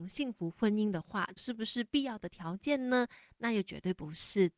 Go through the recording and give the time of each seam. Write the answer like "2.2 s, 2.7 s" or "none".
1.4 s